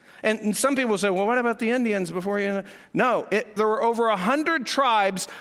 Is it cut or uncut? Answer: cut